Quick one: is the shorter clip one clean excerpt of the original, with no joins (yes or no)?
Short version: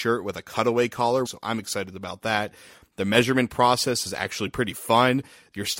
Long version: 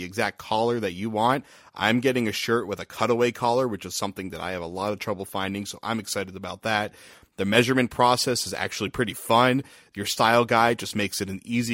no